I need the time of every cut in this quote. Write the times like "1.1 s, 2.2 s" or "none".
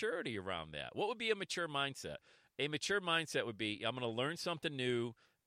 none